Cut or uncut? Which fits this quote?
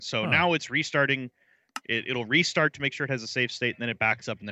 uncut